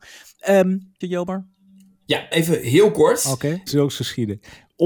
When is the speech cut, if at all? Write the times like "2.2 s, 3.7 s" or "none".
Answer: 1.0 s, 2.3 s, 3.7 s